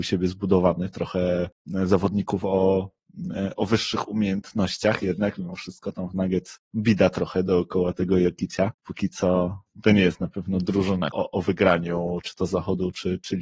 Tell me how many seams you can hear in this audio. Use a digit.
2